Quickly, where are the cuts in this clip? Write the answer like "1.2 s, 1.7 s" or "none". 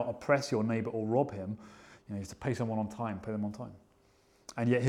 2.0 s, 3.2 s

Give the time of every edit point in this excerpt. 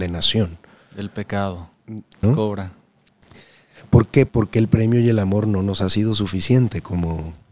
2.2 s, 4.3 s

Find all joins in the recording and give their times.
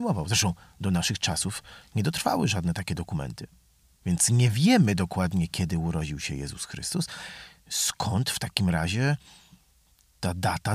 none

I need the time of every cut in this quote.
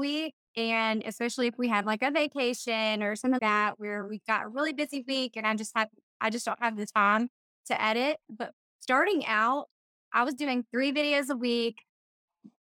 3.4 s

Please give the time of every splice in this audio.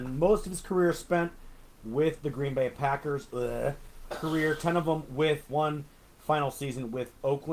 4.1 s, 5.5 s

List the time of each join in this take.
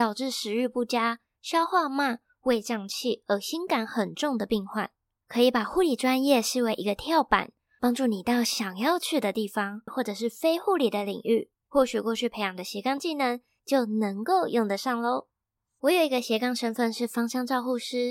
5.2 s, 9.9 s, 11.6 s

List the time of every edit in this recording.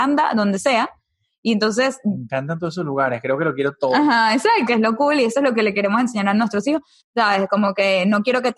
4.7 s, 7.0 s

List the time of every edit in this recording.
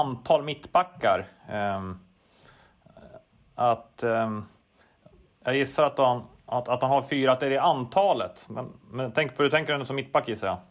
none

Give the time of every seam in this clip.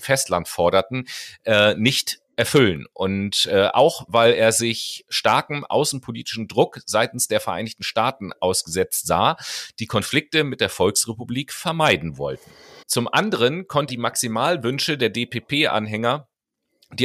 12.8 s, 13.9 s

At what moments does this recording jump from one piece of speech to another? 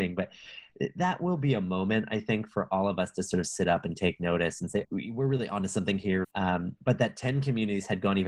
4.8 s, 6.2 s

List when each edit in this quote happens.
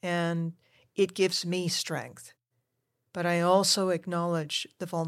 none

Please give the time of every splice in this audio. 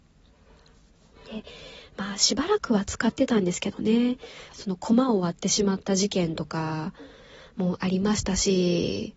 4.5 s

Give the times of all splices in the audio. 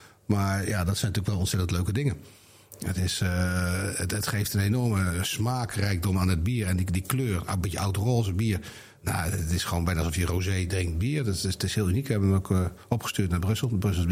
none

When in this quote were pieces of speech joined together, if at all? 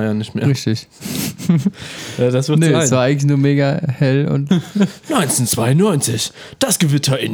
4.5 s

